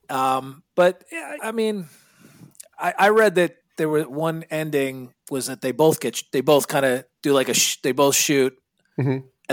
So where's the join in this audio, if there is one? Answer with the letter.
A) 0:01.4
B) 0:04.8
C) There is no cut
A